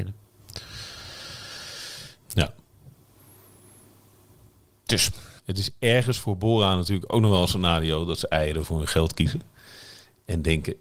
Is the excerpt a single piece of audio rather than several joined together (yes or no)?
no